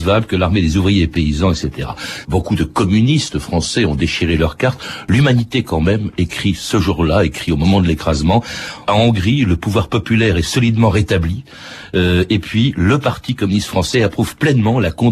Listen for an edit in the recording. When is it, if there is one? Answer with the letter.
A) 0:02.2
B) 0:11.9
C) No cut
A